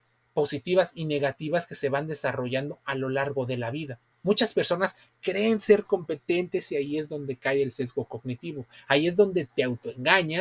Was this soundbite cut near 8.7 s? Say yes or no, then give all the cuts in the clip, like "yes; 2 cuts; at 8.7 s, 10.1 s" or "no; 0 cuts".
no; 1 cut; at 4.1 s